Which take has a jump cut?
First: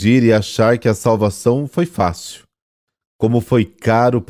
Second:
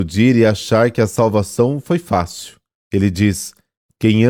second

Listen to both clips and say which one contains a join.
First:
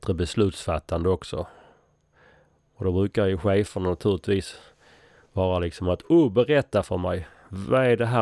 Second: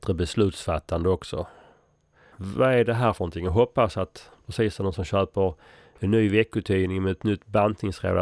second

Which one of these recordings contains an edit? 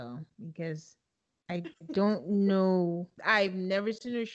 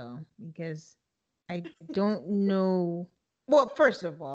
first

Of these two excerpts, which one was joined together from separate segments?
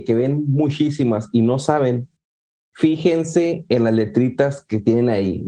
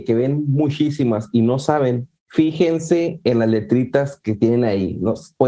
second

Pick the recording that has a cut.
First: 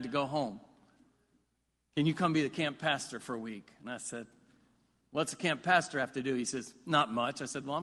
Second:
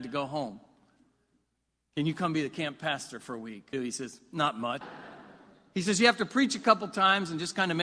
second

